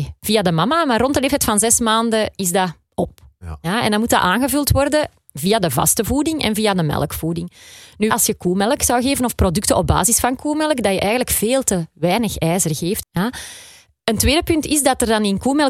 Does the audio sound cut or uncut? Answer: cut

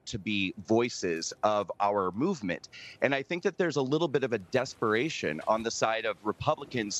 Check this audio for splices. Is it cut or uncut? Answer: uncut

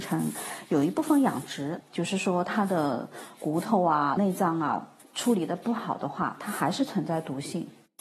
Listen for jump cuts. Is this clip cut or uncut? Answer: cut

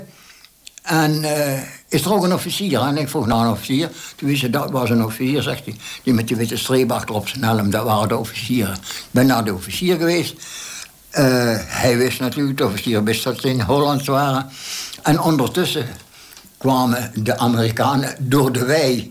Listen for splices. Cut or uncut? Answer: uncut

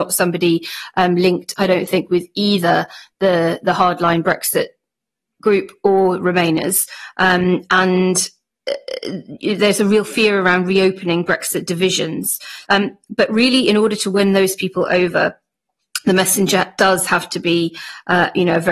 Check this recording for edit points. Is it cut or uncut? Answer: cut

